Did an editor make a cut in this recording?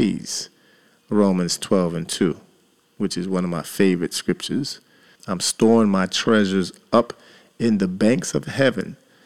yes; 1 cut; at 5.2 s

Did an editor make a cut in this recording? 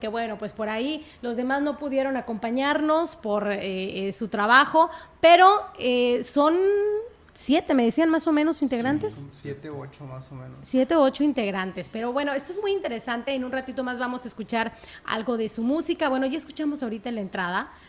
no; 0 cuts

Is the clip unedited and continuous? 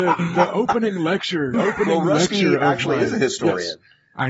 no; 1 cut; at 1.5 s

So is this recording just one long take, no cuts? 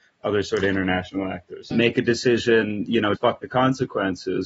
no; 2 cuts; at 1.7 s, 3.2 s

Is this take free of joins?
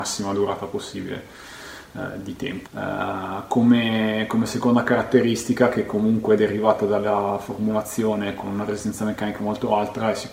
no; 1 cut; at 2.7 s

